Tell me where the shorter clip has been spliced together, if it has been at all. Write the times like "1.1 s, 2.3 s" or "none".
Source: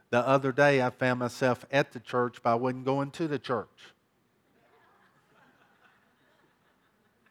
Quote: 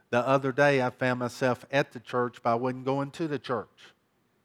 none